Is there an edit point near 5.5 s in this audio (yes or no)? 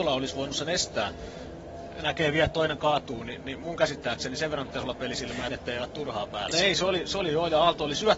yes